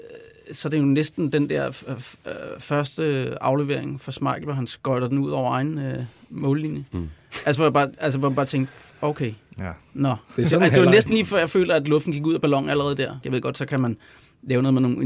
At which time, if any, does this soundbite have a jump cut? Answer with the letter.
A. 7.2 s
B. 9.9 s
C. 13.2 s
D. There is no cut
C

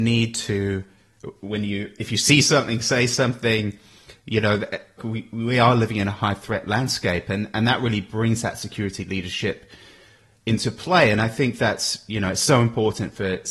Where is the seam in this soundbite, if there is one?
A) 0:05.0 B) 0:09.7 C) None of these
A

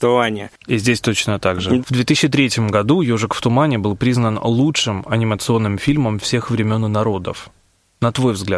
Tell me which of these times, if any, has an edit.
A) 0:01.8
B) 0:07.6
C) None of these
A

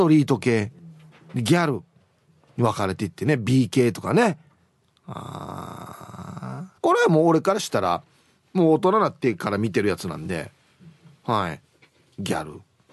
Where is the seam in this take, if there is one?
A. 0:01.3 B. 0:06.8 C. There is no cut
B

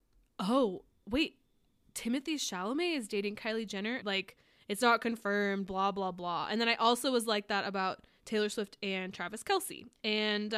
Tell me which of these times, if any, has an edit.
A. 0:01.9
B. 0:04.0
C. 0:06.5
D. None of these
B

